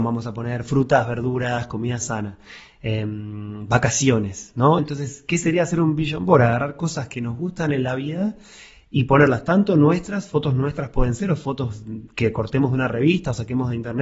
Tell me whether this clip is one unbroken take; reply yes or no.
yes